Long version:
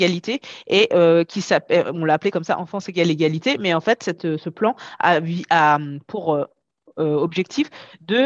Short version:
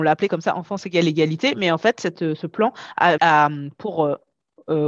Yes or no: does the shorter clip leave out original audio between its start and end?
yes